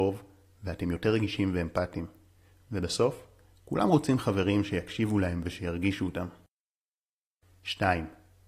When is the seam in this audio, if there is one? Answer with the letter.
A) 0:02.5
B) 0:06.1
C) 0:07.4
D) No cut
D